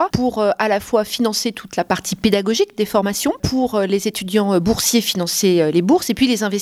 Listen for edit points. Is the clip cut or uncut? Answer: uncut